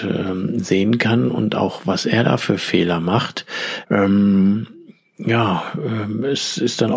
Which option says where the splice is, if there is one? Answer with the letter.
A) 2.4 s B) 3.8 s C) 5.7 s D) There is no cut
B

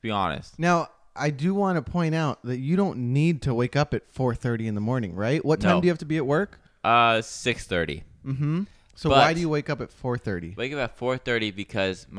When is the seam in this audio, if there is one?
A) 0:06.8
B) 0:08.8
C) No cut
C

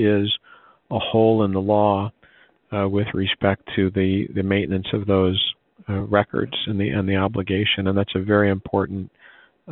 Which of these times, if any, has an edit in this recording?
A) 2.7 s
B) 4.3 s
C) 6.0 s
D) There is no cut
D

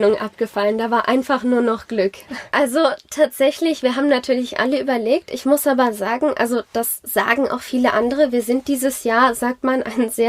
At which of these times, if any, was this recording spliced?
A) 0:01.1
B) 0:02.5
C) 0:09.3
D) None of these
B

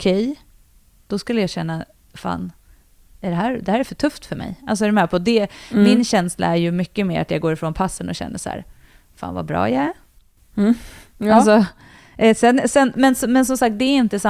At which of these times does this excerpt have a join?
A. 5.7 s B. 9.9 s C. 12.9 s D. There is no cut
D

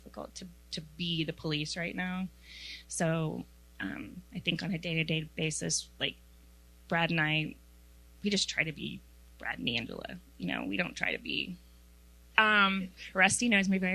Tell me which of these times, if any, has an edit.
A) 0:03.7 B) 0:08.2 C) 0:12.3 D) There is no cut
C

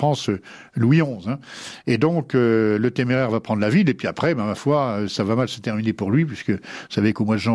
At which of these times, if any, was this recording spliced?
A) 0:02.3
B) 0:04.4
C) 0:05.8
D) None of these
D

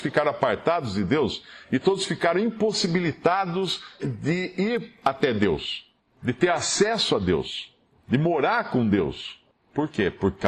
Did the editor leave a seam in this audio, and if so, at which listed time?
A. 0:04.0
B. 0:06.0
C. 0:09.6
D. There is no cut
A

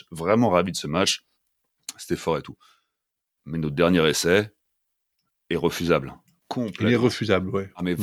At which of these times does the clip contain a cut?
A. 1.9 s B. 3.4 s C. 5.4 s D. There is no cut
D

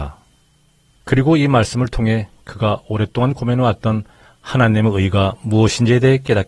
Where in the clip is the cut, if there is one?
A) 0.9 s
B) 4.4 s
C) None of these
A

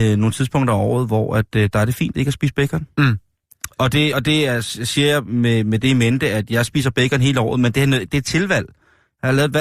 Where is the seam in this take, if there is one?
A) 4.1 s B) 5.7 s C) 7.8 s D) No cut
D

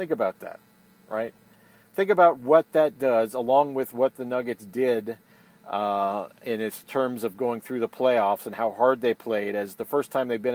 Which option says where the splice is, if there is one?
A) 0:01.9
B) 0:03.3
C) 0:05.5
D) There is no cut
D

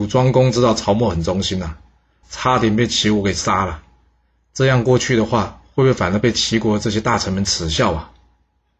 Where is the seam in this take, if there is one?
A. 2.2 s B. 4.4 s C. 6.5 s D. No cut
A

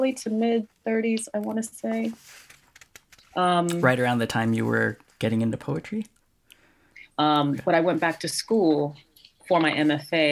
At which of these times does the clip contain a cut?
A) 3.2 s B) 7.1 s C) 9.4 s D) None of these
B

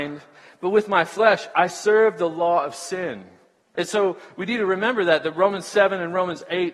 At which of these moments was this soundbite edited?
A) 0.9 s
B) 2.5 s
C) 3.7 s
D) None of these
C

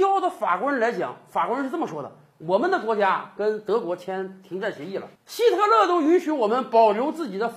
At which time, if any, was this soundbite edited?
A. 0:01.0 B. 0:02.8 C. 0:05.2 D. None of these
C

